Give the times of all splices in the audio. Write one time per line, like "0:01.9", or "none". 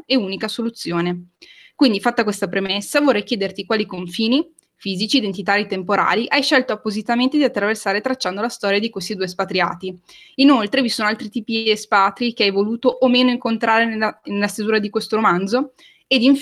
none